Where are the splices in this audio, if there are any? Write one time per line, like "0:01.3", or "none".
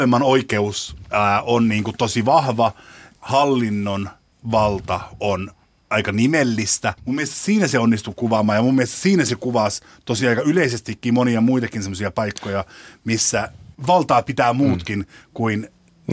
none